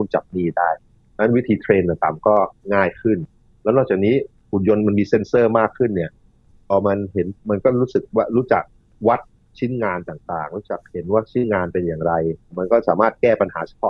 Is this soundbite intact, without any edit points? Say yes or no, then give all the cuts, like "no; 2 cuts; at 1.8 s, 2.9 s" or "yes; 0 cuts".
yes; 0 cuts